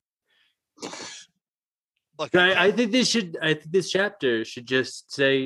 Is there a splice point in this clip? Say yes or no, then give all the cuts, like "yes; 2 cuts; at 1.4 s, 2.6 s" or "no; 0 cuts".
no; 0 cuts